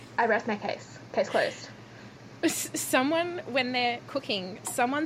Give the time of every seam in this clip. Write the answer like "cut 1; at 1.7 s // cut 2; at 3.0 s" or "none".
none